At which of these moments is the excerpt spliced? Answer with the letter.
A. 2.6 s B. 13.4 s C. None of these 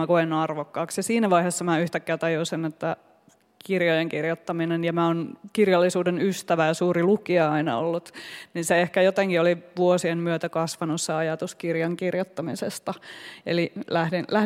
B